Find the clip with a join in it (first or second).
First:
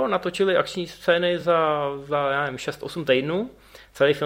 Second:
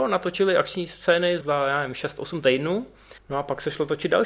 second